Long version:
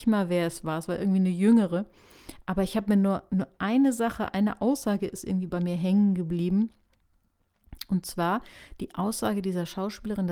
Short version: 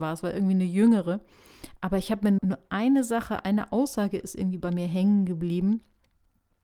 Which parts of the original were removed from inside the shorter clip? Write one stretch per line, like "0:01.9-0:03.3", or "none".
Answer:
0:03.0-0:03.3